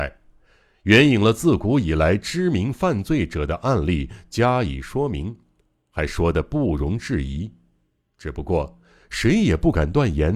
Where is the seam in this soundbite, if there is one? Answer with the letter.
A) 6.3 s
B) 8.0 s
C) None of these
C